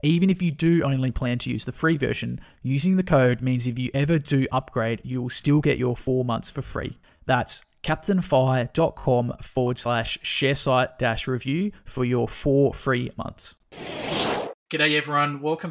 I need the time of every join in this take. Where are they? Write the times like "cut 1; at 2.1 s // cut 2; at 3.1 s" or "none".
cut 1; at 7.1 s